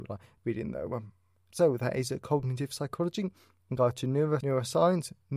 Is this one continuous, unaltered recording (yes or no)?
no